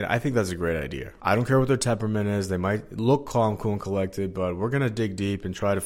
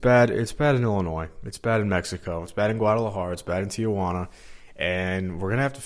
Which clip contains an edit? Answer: first; 1 cut; at 1.2 s

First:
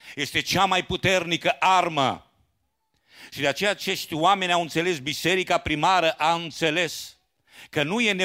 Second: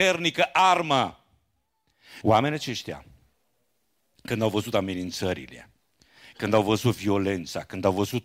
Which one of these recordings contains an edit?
second; 1 cut; at 2.2 s

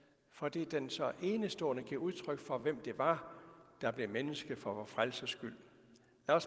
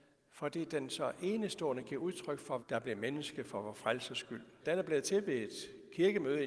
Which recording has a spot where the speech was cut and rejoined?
second; 2 cuts; at 2.6 s, 4.6 s

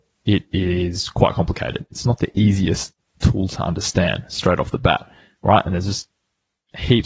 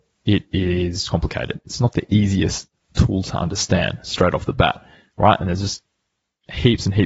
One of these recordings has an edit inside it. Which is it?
second; 1 cut; at 1.1 s

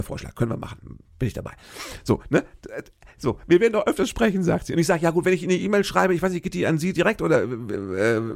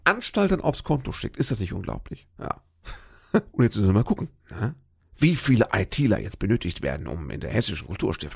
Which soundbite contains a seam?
second; 2 cuts; at 2.3 s, 3.5 s

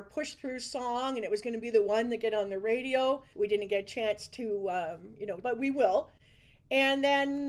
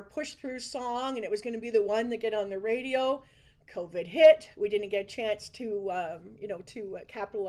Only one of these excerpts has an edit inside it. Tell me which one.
first; 2 cuts; at 3.3 s, 5.4 s

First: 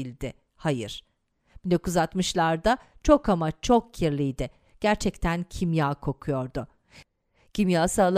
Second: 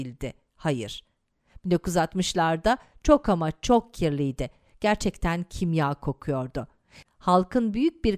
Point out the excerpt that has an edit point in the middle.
second; 1 cut; at 7.0 s

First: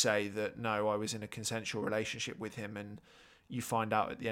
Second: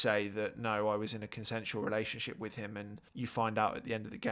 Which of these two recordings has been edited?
second; 1 cut; at 3.1 s

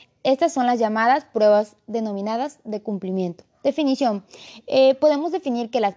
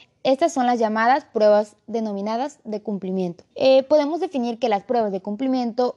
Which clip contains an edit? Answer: second; 1 cut; at 3.5 s

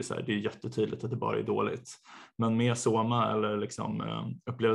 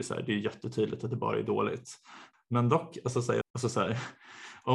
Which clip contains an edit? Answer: second; 2 cuts; at 2.3 s, 3.4 s

